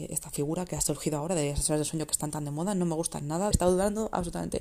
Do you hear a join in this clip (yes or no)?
yes